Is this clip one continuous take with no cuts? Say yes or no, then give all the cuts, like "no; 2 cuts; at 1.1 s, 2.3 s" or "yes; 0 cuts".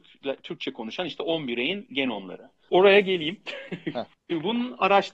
no; 1 cut; at 2.7 s